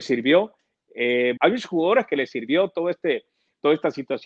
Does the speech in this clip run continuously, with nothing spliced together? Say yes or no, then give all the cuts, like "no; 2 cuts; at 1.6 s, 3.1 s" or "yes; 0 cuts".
no; 1 cut; at 1.4 s